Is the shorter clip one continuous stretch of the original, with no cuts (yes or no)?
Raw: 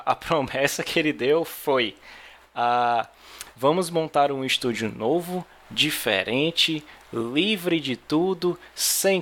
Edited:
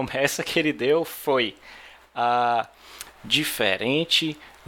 no